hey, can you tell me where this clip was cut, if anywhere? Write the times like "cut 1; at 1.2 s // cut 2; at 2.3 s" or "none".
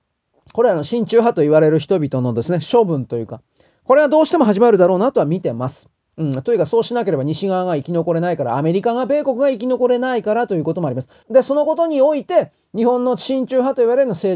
cut 1; at 11.2 s